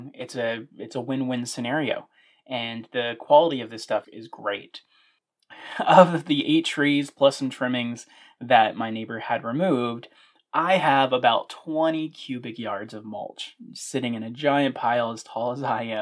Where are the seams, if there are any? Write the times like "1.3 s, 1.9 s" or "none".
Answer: 4.0 s